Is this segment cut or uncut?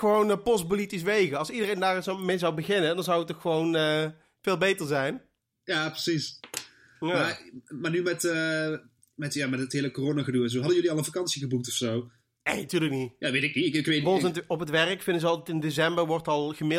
uncut